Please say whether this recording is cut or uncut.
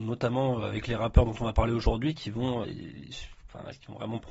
cut